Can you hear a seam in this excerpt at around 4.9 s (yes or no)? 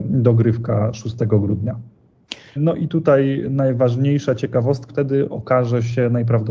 yes